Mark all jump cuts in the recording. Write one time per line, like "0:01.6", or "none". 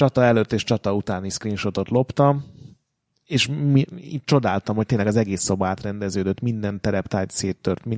none